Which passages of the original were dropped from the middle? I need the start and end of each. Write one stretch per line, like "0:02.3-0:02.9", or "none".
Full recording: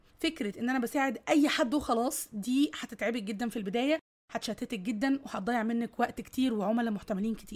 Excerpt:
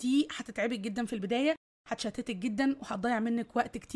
none

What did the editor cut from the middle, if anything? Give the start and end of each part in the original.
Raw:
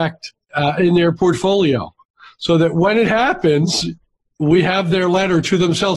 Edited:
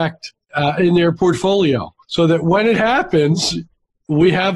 0:02.0-0:02.3

